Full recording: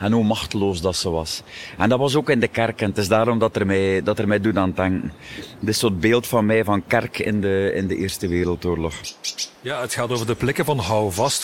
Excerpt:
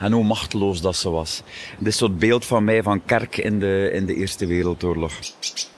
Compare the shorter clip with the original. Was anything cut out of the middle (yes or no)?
yes